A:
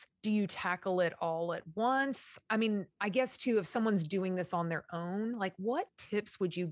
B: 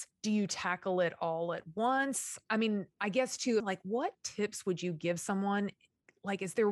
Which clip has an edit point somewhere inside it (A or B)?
B